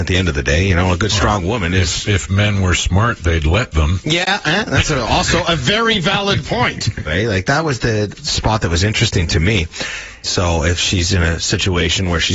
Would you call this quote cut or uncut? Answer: cut